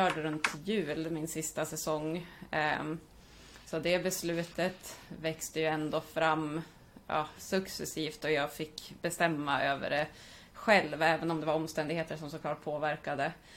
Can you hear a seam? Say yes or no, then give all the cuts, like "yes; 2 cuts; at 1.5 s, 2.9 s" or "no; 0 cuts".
no; 0 cuts